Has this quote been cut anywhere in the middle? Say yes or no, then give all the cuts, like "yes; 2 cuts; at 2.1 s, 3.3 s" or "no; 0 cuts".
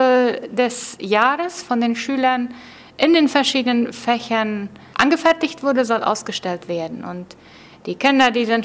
yes; 1 cut; at 4.9 s